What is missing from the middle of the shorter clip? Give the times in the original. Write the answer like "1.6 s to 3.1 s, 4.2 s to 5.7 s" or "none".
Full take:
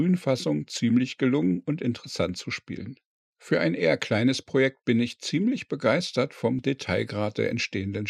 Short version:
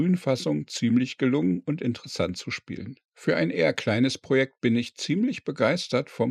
3.1 s to 3.3 s